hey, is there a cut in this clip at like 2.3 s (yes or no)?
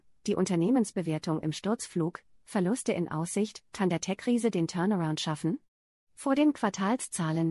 yes